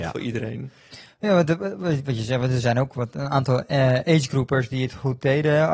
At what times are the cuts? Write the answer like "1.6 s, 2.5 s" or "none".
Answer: none